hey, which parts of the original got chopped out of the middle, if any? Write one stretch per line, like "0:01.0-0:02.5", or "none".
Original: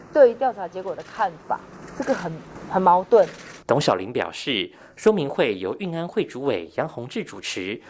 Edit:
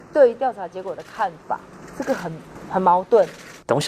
none